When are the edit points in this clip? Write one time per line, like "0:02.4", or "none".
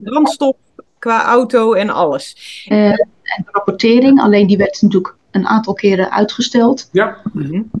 0:02.7